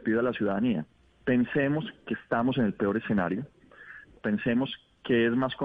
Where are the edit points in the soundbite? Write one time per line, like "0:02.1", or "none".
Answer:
0:04.2